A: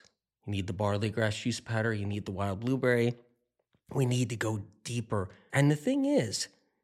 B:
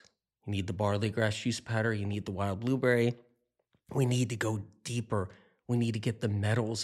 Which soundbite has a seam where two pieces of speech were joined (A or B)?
A